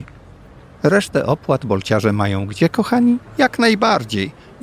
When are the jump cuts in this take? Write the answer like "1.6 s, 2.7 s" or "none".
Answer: 3.3 s